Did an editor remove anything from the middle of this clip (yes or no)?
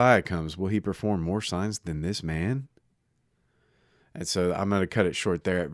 no